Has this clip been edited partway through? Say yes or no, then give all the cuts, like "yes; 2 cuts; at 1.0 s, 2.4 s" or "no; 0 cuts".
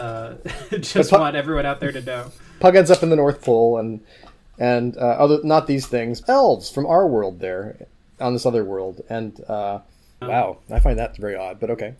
yes; 2 cuts; at 6.2 s, 10.2 s